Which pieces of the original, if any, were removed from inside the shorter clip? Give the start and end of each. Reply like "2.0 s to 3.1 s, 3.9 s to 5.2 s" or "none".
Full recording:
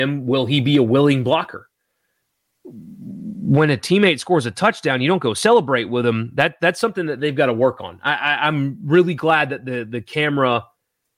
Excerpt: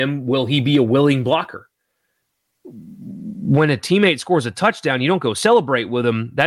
none